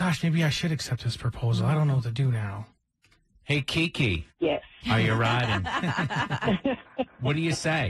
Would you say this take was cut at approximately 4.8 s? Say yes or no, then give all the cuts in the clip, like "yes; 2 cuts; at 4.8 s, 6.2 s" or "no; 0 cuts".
yes; 2 cuts; at 4.8 s, 6.8 s